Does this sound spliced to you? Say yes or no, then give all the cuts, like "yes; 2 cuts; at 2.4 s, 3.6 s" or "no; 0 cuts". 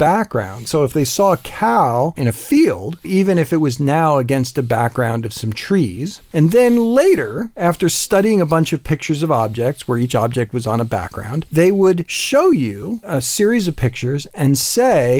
yes; 2 cuts; at 3.0 s, 6.3 s